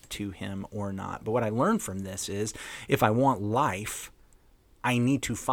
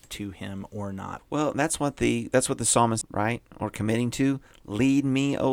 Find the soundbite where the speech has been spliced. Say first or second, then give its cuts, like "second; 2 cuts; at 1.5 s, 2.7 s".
second; 2 cuts; at 1.2 s, 3.0 s